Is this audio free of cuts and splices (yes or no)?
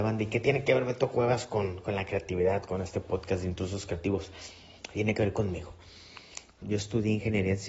no